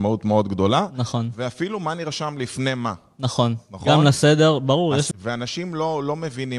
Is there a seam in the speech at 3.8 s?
no; 1 cut; at 5.1 s

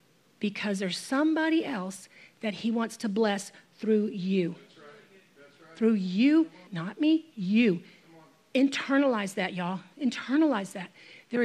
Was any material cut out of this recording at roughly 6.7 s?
yes; 1 cut; at 6.7 s

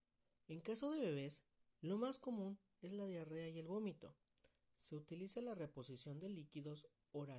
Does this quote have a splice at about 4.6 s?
no; 0 cuts

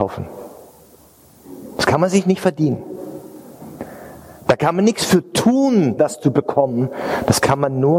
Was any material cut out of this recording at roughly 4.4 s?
no; 1 cut; at 6.0 s

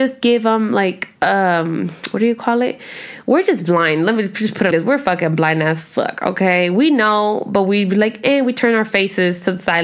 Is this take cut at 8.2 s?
no; 2 cuts; at 1.2 s, 4.7 s

